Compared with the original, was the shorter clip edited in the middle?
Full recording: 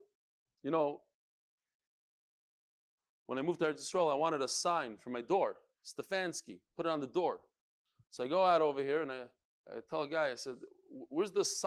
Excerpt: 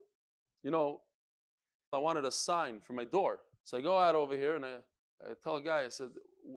yes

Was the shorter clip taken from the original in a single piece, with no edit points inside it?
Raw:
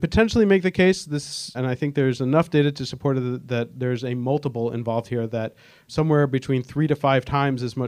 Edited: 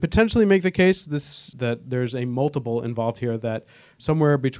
no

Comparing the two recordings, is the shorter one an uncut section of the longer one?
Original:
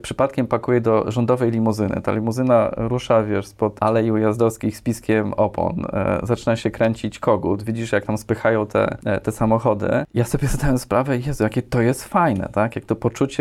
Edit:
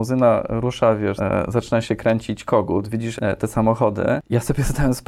no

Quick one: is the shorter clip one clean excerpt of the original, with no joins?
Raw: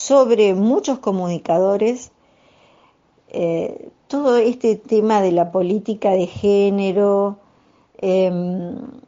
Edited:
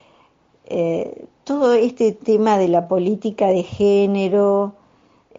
yes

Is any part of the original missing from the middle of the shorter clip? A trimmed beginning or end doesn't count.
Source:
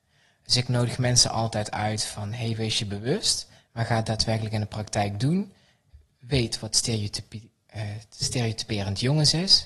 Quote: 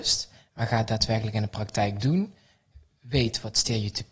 no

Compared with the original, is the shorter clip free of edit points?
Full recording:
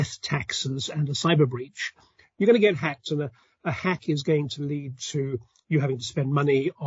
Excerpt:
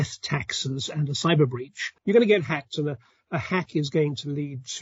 no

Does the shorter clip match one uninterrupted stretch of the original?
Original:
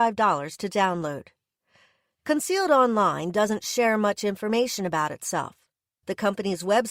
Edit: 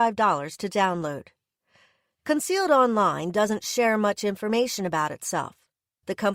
yes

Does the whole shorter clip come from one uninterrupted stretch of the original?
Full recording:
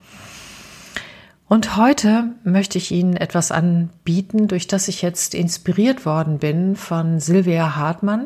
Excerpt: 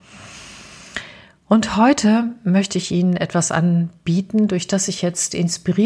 yes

